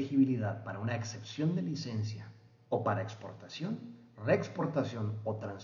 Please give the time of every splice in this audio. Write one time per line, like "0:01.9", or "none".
none